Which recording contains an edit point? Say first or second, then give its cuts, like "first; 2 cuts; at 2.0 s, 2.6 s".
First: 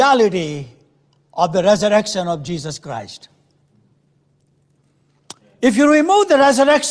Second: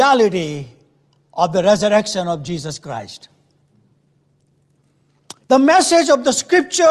second; 1 cut; at 5.4 s